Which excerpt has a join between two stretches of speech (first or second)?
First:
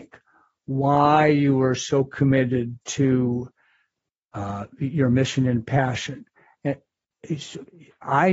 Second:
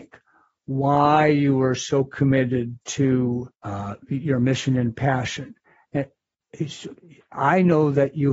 second